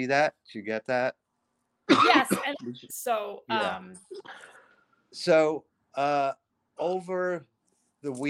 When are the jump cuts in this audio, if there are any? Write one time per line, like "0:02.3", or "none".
0:02.9